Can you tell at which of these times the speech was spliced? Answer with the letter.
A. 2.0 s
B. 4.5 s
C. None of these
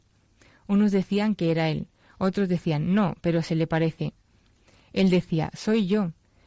C